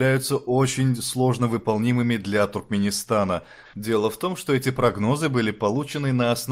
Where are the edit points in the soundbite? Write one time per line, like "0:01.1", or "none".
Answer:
0:03.6